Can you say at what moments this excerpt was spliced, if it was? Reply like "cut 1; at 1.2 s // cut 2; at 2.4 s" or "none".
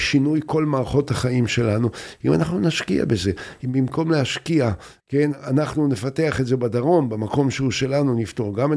cut 1; at 5.0 s